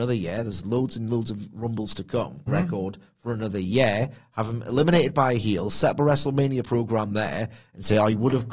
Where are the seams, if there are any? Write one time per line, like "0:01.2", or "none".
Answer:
0:02.5

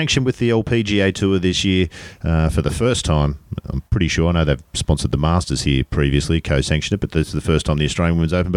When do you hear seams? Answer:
none

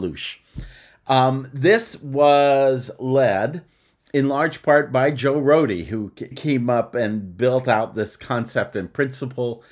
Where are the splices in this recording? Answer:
0:06.3

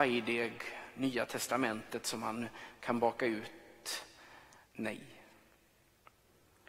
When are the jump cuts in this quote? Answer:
0:04.6

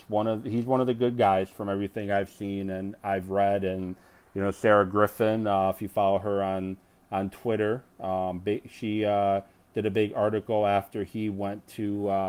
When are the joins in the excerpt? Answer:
none

